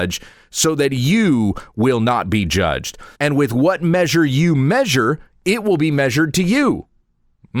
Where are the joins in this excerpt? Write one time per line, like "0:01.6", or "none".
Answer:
0:03.1